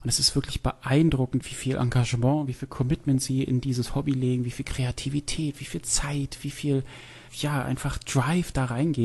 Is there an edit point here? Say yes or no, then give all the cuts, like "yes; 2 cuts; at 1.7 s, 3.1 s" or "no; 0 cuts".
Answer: no; 0 cuts